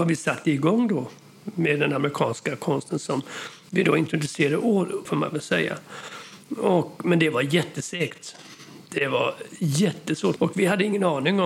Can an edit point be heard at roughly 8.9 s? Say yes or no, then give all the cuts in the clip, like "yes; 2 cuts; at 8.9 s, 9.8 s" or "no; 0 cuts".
no; 2 cuts; at 5.1 s, 10.4 s